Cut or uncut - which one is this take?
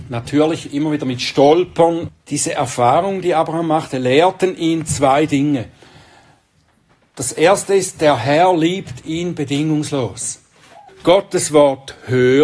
cut